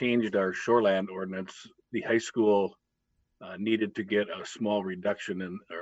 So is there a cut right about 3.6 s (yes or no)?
no